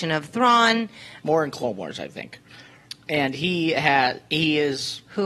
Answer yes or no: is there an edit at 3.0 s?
no